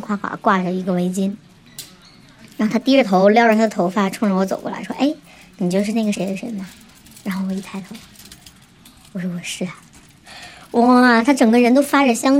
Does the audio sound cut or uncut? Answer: uncut